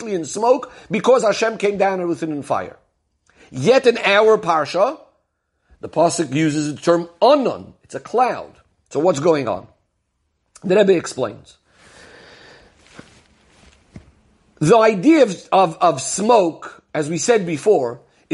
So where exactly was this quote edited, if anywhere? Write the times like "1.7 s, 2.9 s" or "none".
none